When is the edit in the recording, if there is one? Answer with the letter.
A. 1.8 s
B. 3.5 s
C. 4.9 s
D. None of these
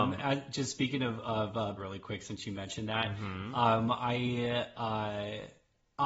A